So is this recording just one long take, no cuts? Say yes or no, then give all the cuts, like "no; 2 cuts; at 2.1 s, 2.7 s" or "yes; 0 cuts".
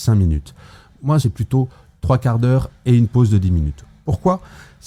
no; 1 cut; at 1.2 s